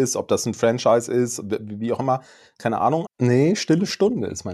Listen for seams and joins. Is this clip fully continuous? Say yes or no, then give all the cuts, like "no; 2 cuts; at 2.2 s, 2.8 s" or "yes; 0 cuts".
no; 1 cut; at 3.1 s